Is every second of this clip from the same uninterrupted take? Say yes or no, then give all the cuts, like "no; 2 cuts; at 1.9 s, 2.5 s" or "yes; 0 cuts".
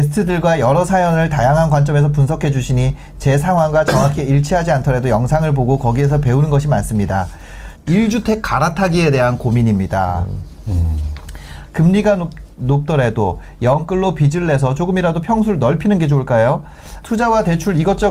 no; 3 cuts; at 7.7 s, 11.7 s, 17.0 s